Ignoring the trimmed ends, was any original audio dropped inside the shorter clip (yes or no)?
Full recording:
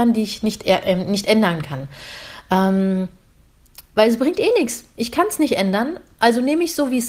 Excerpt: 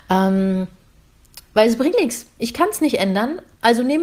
yes